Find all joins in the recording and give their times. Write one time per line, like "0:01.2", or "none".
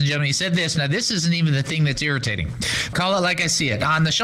0:02.9